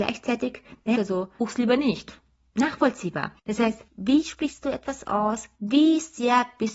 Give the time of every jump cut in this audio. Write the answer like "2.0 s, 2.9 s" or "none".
0.9 s, 3.9 s, 5.6 s